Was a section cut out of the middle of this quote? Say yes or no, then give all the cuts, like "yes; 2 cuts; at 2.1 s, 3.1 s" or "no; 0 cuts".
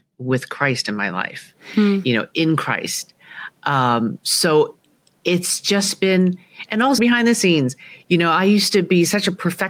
yes; 1 cut; at 7.0 s